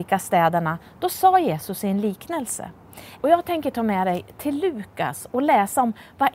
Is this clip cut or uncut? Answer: cut